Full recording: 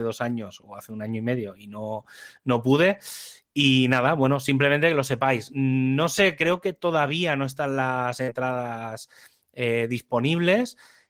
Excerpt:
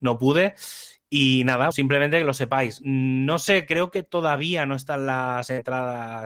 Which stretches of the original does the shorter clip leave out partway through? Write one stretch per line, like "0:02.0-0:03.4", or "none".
0:04.1-0:04.4